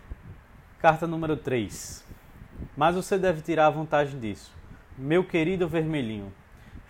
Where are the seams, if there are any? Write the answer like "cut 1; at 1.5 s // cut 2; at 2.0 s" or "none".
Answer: cut 1; at 2.7 s // cut 2; at 5.0 s